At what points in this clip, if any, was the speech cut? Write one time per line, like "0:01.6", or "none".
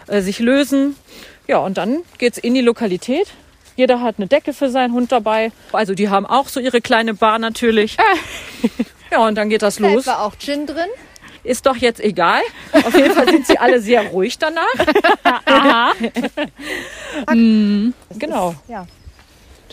0:05.7
0:11.4
0:17.3